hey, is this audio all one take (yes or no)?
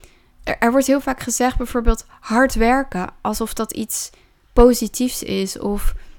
yes